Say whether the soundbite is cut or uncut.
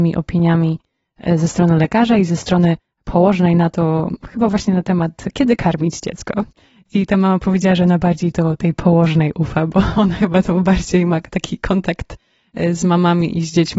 uncut